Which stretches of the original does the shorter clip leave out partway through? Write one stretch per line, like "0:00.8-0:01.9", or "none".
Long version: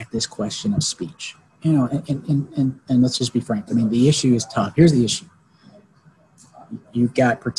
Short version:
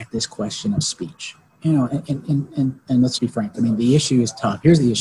0:03.2-0:03.3